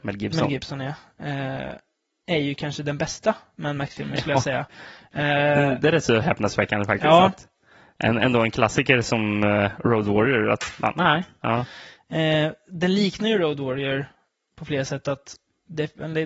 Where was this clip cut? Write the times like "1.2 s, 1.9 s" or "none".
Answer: 11.4 s